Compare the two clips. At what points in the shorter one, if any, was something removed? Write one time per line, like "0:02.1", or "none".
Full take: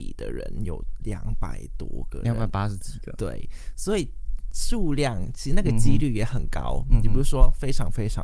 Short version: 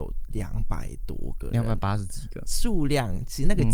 0:02.5